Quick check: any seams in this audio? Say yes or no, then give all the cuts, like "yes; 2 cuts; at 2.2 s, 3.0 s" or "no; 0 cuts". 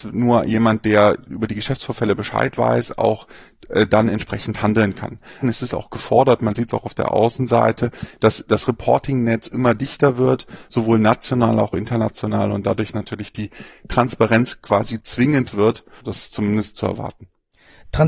yes; 2 cuts; at 5.4 s, 16.0 s